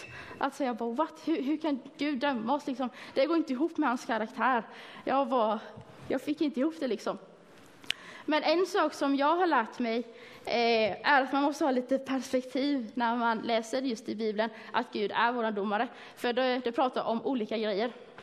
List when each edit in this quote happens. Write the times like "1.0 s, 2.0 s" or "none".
none